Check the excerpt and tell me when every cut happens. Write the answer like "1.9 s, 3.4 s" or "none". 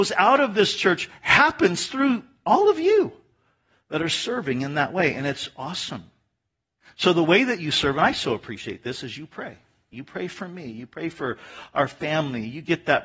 6.8 s, 9.9 s